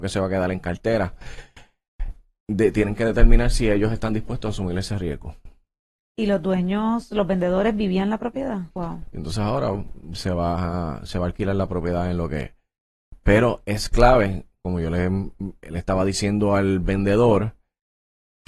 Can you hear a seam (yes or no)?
yes